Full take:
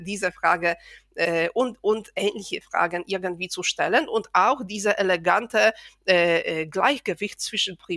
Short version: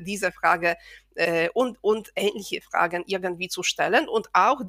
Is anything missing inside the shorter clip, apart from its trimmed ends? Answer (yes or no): no